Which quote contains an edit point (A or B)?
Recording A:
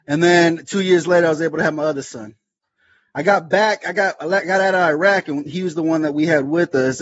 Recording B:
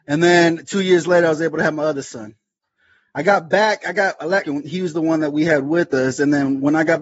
B